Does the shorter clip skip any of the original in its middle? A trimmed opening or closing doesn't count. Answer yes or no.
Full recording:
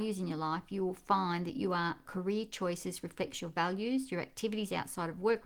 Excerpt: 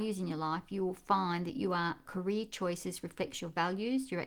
no